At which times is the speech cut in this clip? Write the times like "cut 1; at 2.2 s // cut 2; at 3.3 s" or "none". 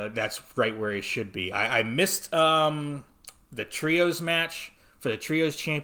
none